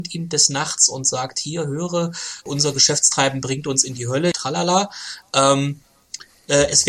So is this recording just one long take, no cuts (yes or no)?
no